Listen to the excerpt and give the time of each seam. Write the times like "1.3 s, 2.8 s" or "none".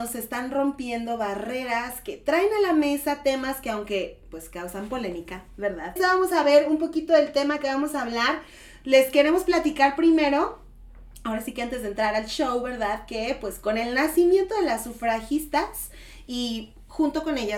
6.0 s